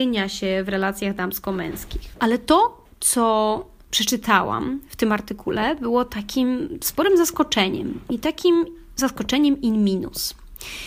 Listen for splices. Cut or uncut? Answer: uncut